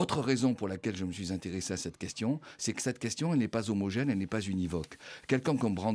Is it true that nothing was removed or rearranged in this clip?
yes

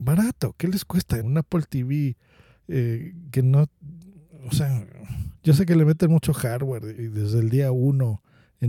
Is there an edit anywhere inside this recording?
yes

